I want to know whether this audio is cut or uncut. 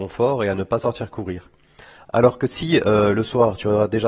uncut